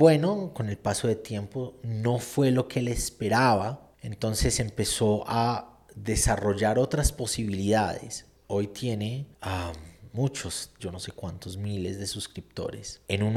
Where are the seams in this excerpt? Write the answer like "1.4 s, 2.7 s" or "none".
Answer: 8.4 s, 10.8 s